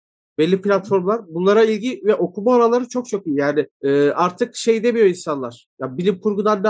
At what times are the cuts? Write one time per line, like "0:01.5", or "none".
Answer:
0:03.7